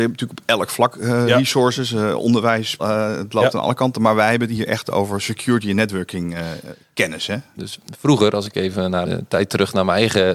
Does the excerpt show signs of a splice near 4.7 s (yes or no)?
no